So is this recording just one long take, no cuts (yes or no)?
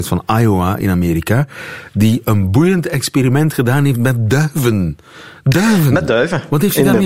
yes